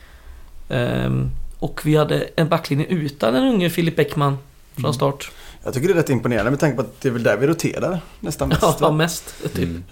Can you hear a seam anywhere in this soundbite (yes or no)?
no